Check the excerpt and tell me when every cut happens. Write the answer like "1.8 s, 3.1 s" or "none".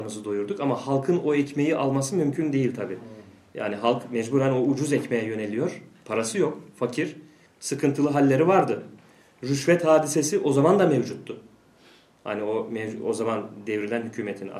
7.5 s